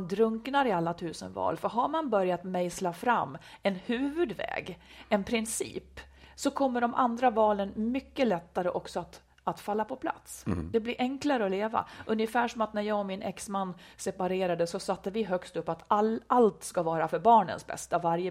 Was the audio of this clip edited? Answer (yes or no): no